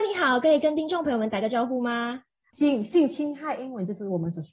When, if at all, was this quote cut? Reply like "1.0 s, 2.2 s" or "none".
2.5 s